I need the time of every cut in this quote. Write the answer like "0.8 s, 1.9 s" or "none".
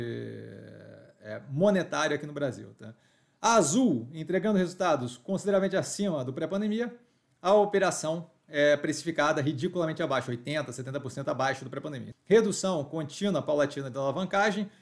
12.1 s